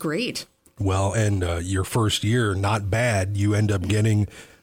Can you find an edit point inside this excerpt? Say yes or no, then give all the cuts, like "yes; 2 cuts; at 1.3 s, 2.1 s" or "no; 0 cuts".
no; 0 cuts